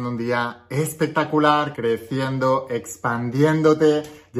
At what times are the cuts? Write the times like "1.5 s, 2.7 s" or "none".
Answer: 1.7 s